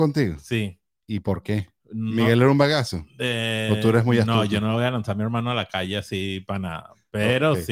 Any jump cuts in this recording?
no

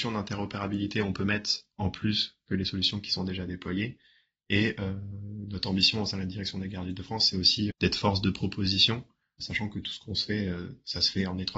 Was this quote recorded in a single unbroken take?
no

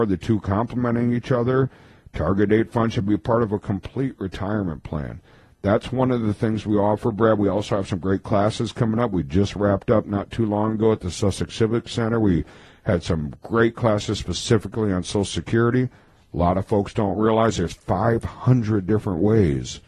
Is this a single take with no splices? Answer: yes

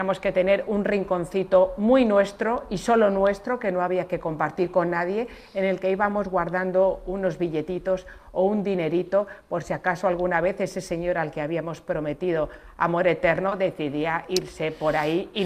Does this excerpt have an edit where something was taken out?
no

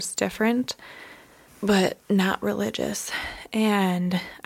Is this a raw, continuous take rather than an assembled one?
yes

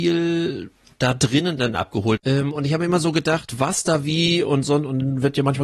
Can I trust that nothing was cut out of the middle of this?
no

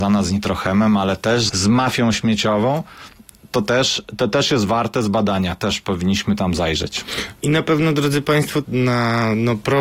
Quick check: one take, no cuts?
no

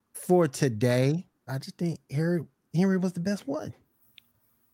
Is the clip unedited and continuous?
no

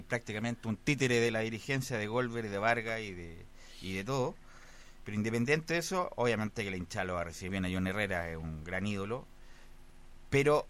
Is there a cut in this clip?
yes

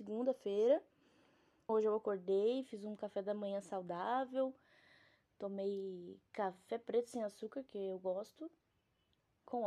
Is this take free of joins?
no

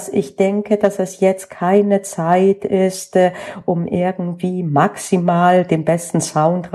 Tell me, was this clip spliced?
no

